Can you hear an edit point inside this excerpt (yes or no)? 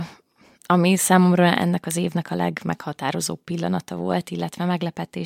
no